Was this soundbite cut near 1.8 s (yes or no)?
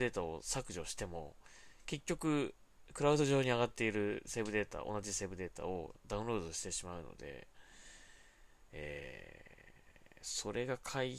no